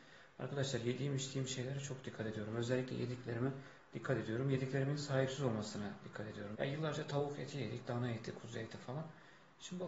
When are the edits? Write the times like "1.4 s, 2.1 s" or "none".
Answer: 6.5 s